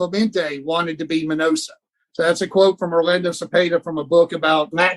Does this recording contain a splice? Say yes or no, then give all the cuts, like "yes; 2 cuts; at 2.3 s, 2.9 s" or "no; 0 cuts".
no; 0 cuts